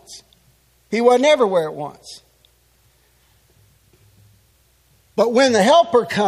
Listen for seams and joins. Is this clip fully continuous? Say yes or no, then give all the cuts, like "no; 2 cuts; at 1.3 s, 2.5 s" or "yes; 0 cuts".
yes; 0 cuts